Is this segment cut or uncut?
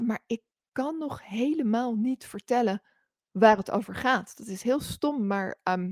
uncut